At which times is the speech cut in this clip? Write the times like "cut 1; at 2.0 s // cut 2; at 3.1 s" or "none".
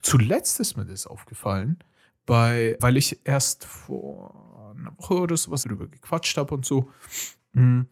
cut 1; at 2.8 s // cut 2; at 5.6 s

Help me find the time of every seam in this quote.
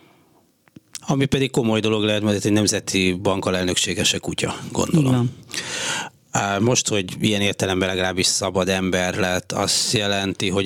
cut 1; at 1.0 s

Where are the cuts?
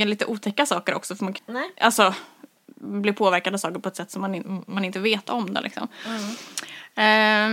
cut 1; at 1.4 s

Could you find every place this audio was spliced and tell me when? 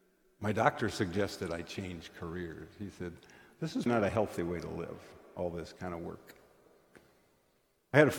cut 1; at 3.9 s

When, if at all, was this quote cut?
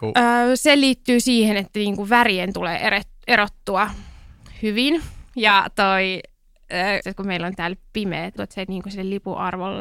cut 1; at 7.0 s // cut 2; at 8.4 s

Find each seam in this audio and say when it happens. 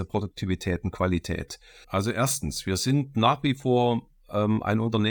cut 1; at 1.8 s

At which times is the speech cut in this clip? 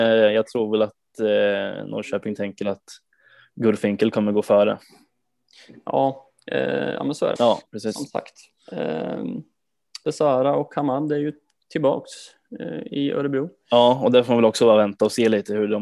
cut 1; at 7.4 s // cut 2; at 10.0 s

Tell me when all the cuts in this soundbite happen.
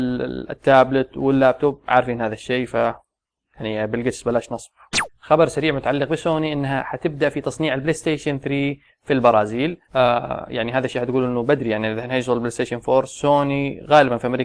cut 1; at 9.8 s

